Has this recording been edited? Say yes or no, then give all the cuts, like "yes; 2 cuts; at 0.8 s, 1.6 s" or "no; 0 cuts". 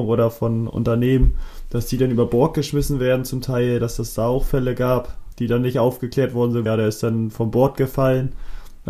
yes; 2 cuts; at 5.3 s, 6.7 s